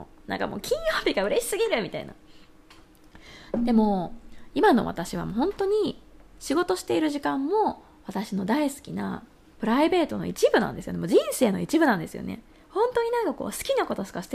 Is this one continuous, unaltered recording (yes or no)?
yes